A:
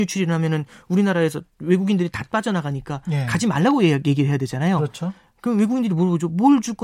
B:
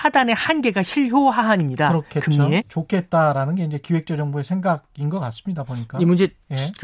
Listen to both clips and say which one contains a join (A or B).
B